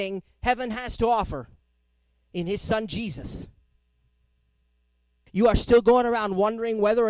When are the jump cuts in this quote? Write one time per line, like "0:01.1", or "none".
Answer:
0:05.3

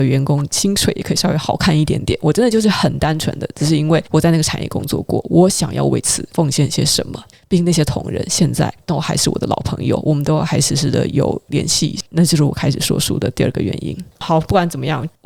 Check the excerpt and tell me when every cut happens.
none

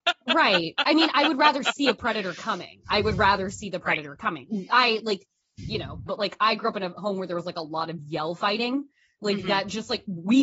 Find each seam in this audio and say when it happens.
0:06.1

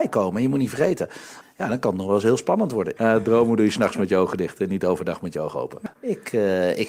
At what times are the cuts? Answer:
0:01.4
0:03.0
0:05.9

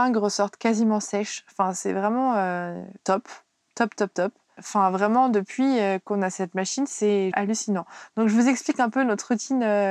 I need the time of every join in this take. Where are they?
0:03.0
0:04.6
0:07.3

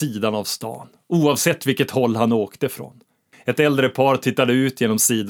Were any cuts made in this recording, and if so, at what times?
0:03.3

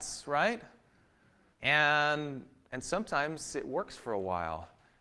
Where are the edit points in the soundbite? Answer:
0:01.5

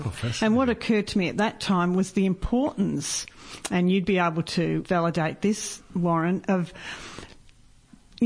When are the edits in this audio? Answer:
0:04.8

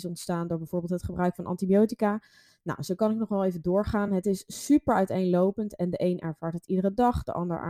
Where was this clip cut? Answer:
none

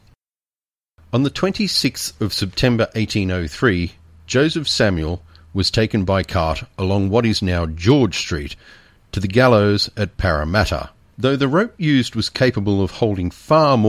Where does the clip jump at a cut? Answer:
0:11.0

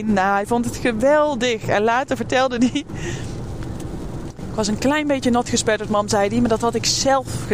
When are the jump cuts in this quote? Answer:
0:04.3

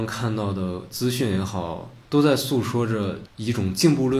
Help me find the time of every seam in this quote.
0:02.0

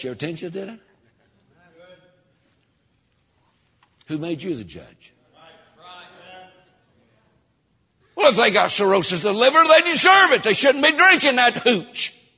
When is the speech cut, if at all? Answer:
none

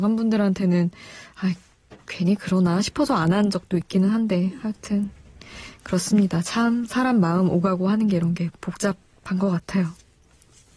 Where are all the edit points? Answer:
0:02.0
0:08.6

